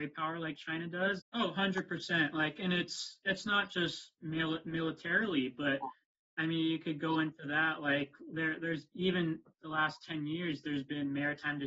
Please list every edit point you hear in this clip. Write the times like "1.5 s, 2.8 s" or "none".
1.2 s